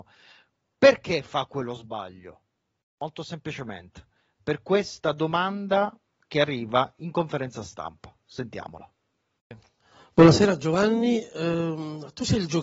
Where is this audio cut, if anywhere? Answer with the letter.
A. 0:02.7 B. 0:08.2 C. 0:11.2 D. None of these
D